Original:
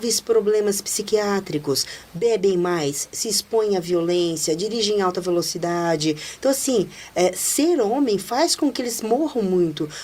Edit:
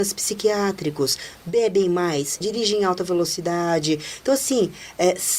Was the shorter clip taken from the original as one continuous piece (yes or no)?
no